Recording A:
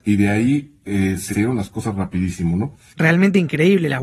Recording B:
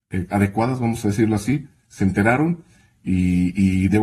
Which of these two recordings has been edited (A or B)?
A